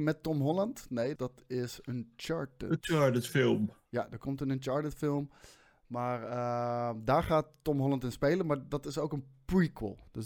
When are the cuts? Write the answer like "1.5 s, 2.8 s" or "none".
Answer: 1.2 s